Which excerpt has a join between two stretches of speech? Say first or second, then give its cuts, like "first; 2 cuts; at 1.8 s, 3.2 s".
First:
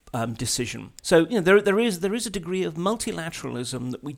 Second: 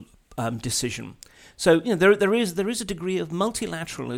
first; 1 cut; at 1.0 s